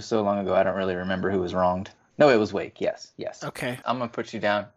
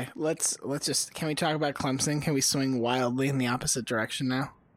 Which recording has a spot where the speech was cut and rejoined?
first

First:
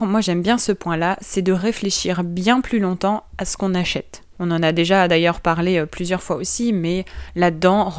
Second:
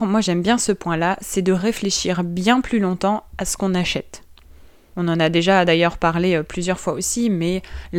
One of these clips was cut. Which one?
first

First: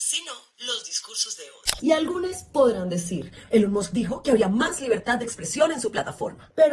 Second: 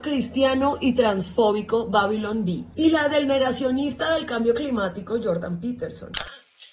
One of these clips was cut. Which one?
first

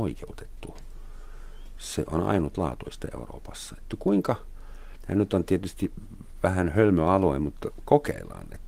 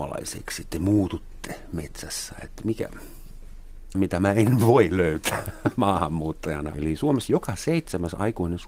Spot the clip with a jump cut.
second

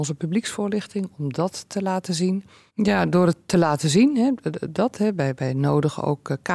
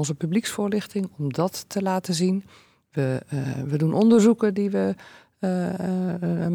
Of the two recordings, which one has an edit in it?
first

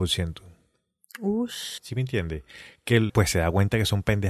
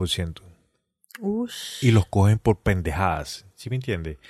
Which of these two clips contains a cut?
first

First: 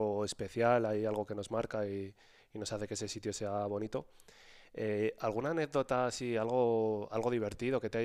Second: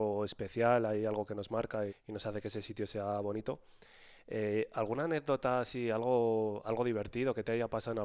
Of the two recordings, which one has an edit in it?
second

